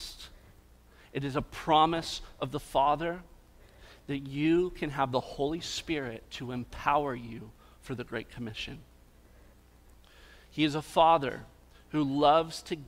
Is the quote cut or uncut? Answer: uncut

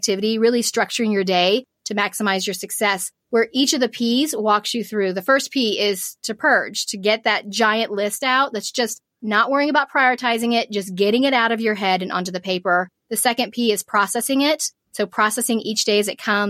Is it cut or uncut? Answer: uncut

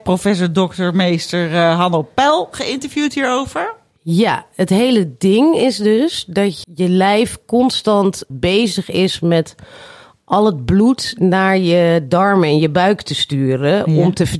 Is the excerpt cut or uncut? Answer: cut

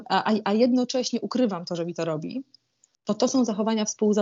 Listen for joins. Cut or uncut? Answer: uncut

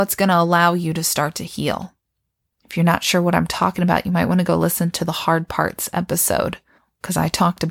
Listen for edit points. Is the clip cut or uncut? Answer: cut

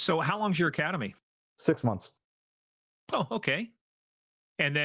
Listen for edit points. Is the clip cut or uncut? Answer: uncut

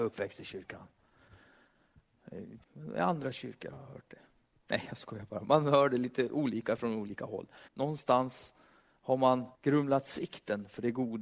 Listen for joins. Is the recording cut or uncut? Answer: cut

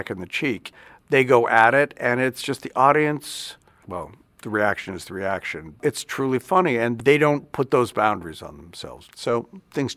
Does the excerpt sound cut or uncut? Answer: cut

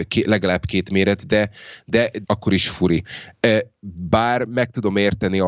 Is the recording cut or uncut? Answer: cut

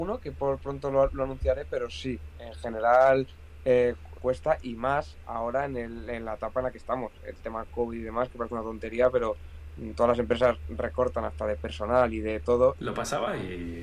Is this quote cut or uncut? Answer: cut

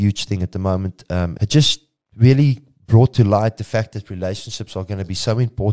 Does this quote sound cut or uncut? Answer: cut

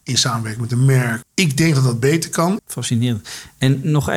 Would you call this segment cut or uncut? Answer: cut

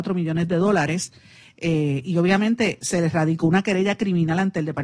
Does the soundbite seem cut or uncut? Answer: uncut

